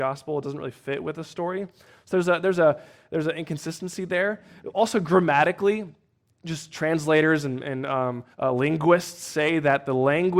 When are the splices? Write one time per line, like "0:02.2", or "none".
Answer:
0:08.3